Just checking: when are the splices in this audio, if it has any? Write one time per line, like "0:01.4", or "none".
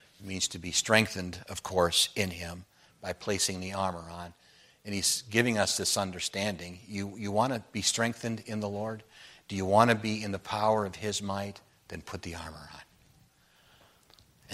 none